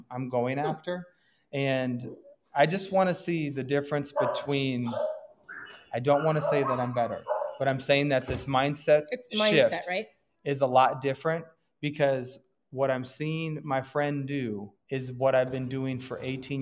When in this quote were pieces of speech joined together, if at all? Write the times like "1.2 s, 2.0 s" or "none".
14.8 s